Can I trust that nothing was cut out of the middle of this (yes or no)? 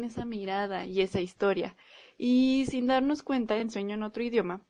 yes